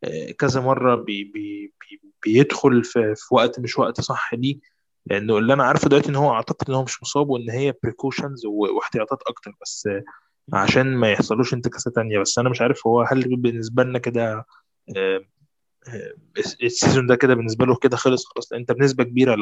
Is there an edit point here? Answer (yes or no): no